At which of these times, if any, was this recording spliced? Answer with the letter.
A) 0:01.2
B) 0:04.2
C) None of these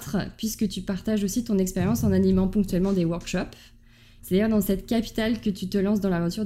B